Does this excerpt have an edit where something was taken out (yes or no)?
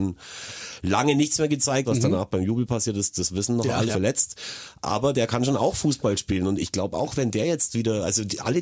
yes